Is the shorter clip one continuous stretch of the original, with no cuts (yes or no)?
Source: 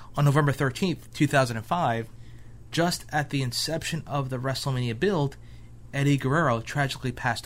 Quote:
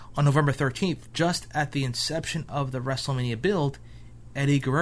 no